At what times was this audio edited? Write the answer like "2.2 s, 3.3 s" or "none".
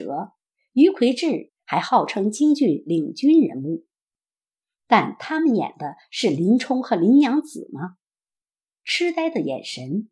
1.5 s